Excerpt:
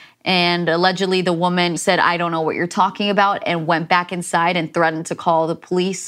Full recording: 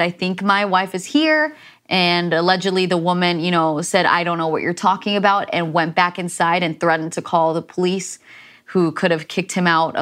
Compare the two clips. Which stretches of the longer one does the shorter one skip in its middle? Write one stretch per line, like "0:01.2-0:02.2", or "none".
0:03.4-0:03.8